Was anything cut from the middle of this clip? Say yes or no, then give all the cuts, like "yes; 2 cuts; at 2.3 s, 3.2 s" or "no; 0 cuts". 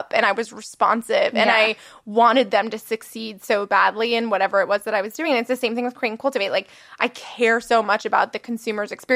no; 0 cuts